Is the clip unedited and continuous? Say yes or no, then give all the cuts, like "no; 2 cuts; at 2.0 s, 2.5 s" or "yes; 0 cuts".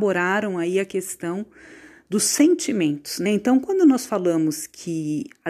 no; 1 cut; at 3.3 s